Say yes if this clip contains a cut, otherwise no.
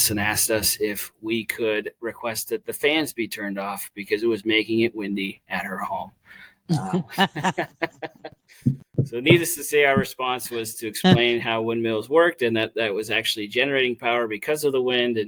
no